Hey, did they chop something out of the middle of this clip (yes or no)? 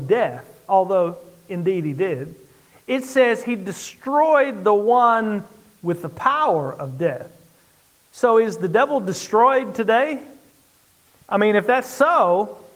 no